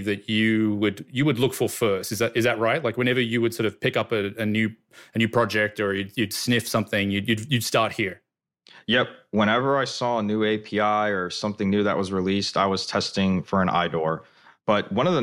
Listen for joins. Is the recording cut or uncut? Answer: uncut